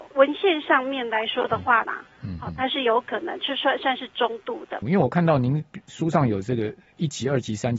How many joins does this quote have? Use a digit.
2